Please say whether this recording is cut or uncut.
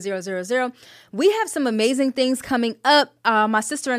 uncut